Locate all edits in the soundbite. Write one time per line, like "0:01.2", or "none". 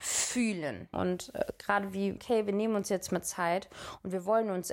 0:00.9
0:02.2